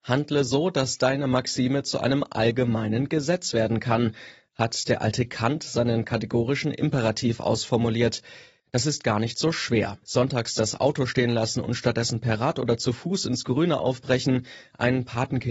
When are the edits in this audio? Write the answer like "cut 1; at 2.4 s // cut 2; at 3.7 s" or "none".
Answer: cut 1; at 8.6 s // cut 2; at 10.0 s